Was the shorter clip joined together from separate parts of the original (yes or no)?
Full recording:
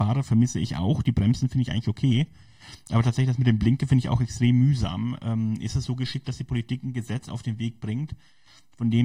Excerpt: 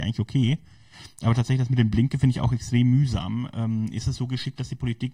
no